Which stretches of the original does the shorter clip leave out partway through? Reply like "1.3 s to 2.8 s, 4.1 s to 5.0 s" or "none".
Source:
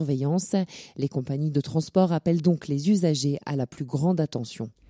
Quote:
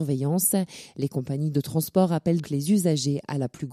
2.4 s to 2.6 s

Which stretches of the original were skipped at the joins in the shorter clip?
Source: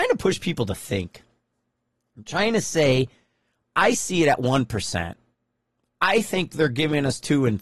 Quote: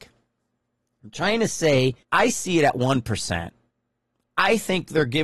3.2 s to 3.7 s

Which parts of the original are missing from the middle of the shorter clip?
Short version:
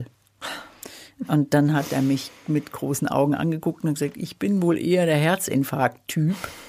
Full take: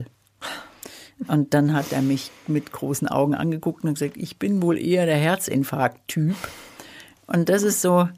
none

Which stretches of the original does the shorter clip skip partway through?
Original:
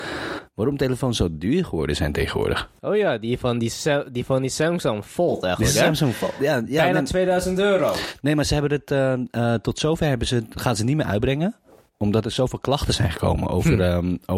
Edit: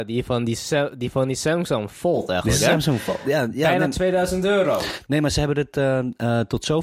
none

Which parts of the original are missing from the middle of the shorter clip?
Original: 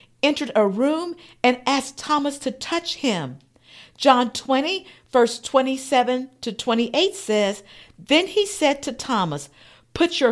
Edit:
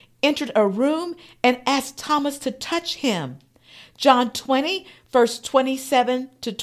none

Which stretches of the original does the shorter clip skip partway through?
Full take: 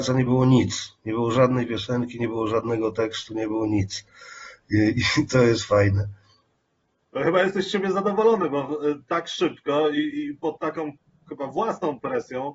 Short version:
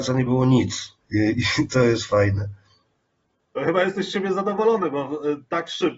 1.0 s to 4.6 s

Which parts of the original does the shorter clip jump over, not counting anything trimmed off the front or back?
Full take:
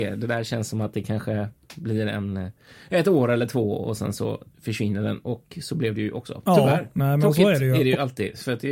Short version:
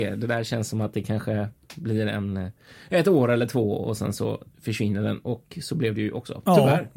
none

